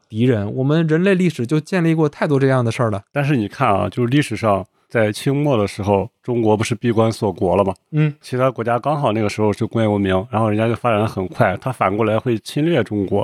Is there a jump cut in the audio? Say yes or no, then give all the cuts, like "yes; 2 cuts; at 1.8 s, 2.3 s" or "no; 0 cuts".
yes; 1 cut; at 8.2 s